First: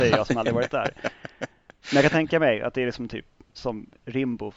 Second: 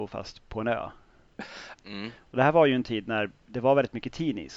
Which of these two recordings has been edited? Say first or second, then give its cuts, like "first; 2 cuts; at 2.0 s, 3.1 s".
second; 1 cut; at 1.8 s